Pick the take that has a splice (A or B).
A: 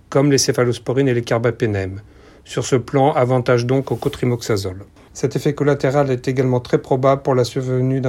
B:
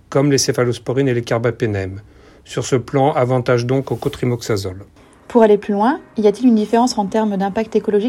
A